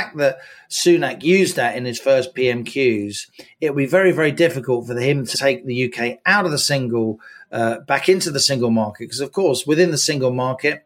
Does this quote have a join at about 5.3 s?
yes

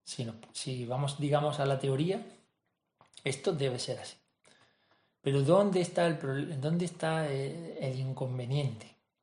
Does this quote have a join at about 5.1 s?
no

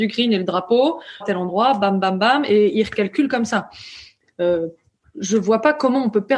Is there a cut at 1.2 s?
yes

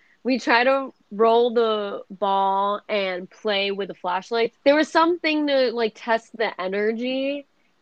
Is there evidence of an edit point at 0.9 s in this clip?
no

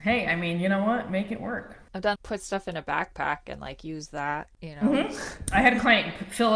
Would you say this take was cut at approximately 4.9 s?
no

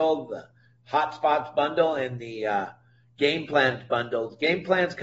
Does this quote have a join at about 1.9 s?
no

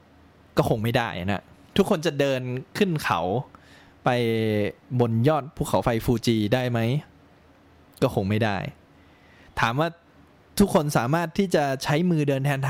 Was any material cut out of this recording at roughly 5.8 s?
no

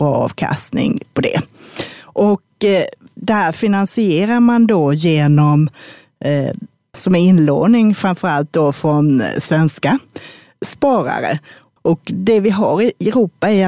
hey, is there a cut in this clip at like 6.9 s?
yes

